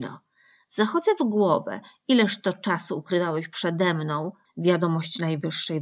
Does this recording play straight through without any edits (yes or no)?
no